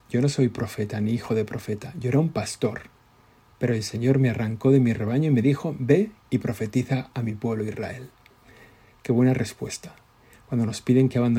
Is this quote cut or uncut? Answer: uncut